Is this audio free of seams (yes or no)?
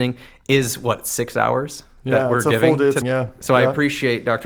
no